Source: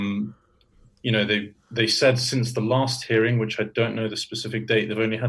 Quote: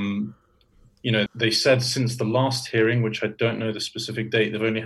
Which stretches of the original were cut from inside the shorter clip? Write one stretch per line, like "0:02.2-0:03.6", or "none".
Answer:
0:01.3-0:01.6